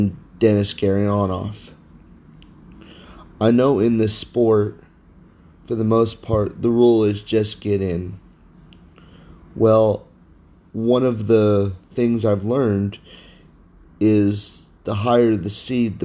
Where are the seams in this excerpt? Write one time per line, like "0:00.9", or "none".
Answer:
none